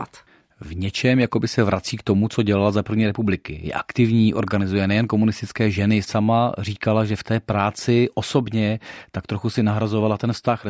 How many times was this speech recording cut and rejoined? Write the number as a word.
zero